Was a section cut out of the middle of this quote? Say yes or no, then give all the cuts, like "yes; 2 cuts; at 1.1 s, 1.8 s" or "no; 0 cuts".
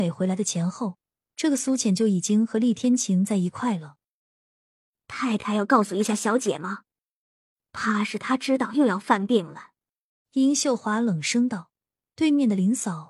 yes; 1 cut; at 10.2 s